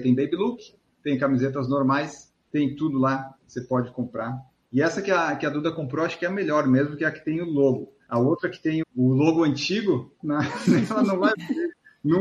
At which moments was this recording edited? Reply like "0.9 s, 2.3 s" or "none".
8.8 s, 10.2 s